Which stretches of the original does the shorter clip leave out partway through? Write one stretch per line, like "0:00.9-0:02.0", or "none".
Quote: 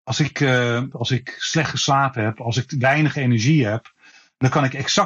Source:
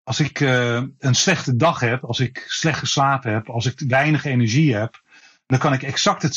0:00.9-0:02.0